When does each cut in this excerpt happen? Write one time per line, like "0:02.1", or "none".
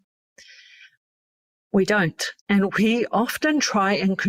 0:02.4